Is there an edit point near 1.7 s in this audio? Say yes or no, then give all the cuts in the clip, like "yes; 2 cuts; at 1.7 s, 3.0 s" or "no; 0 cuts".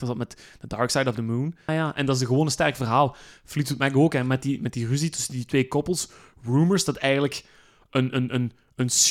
yes; 1 cut; at 1.7 s